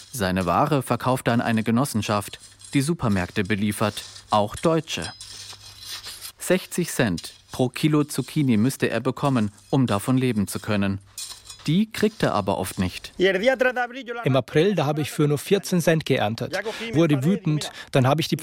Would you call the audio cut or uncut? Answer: uncut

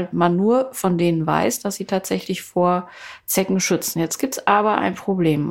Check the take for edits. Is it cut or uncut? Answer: uncut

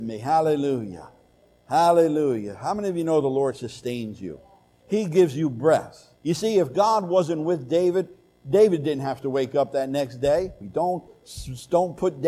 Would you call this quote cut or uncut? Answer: cut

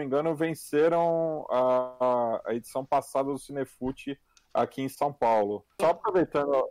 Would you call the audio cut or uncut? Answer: cut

